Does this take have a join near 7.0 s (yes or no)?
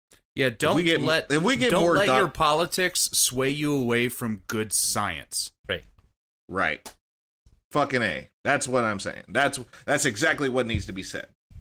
no